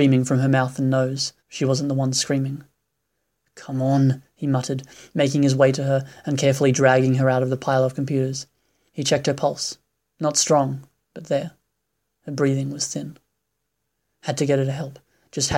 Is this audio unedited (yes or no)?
no